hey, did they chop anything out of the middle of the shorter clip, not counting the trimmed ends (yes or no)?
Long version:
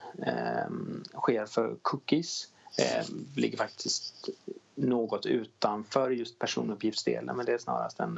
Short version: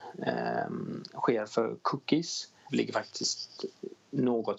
yes